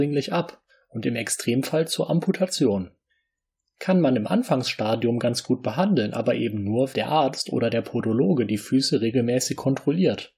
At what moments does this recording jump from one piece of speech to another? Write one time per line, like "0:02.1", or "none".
0:06.9